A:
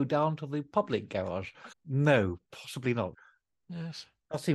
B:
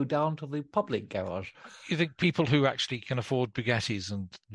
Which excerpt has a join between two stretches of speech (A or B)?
A